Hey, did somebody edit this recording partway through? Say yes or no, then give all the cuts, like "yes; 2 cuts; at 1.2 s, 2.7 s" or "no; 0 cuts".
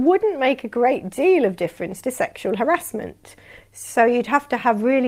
no; 0 cuts